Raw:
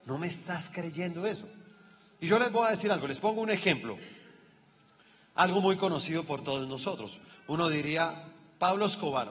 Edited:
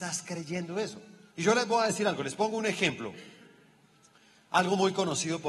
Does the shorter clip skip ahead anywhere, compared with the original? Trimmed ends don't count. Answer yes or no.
yes